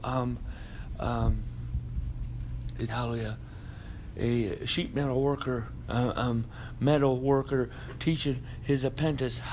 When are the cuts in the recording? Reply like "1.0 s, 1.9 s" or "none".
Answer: 2.9 s, 5.8 s